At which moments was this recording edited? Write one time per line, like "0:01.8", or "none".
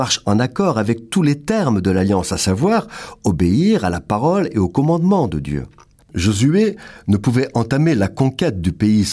0:06.0

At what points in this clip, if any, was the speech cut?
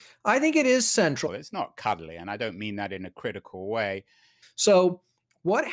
0:01.3
0:04.4

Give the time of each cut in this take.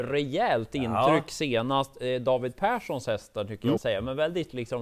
0:03.8

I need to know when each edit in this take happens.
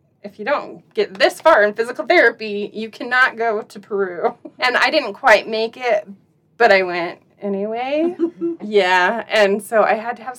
0:04.6
0:08.6

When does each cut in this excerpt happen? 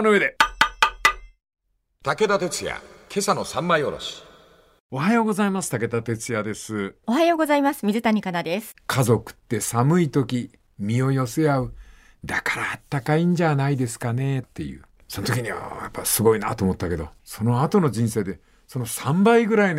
0:08.7
0:15.0
0:17.2

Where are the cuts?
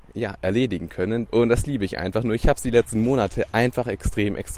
0:01.3

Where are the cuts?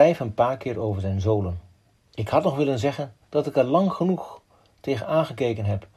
0:02.1
0:03.2

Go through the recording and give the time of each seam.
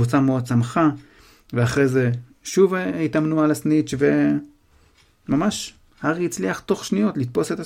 none

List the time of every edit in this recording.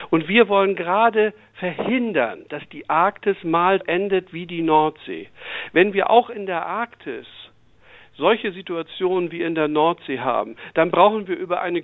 0:03.8

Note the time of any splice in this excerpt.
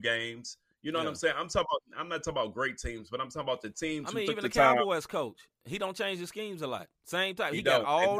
none

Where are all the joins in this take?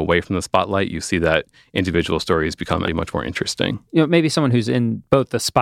0:02.8

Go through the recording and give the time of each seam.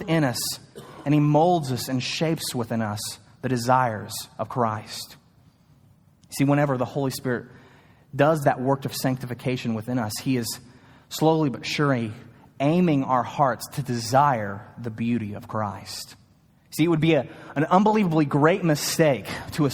0:16.5

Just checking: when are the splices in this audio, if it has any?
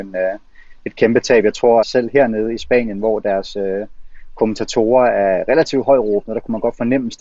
0:01.8

